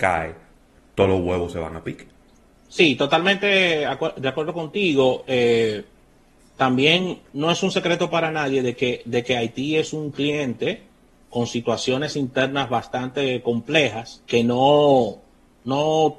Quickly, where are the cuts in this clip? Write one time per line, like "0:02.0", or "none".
0:11.2
0:14.3